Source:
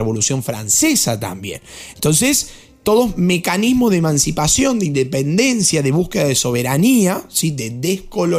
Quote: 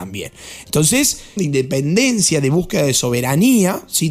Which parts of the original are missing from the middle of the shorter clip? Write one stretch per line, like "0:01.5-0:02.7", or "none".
0:02.7-0:04.8